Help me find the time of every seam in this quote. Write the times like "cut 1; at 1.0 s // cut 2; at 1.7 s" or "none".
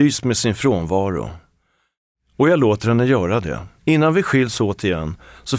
cut 1; at 3.8 s